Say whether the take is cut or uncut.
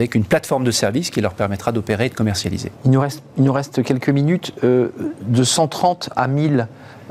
uncut